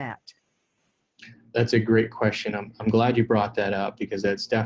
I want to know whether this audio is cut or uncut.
uncut